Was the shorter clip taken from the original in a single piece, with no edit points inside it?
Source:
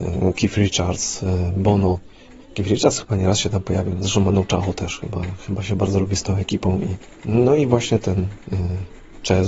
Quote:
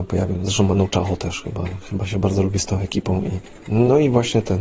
yes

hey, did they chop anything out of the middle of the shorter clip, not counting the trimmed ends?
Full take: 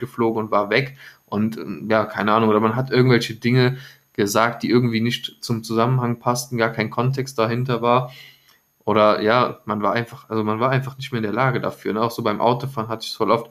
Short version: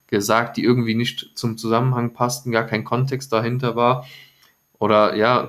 no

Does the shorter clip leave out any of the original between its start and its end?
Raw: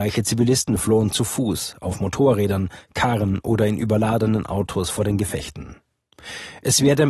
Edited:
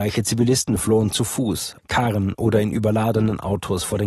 yes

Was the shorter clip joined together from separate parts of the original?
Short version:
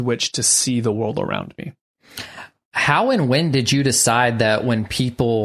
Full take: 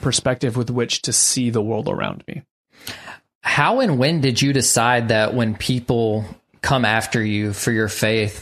no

